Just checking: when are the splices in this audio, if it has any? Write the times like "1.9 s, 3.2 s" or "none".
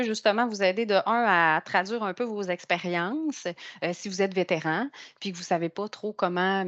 none